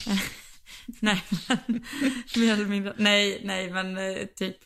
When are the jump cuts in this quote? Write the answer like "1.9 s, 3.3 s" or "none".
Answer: none